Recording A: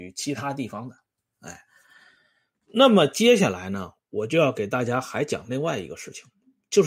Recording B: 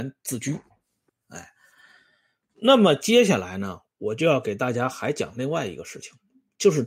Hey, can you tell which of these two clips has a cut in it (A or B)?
B